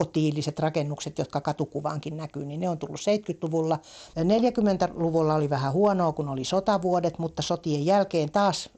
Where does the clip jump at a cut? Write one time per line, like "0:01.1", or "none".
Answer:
0:04.1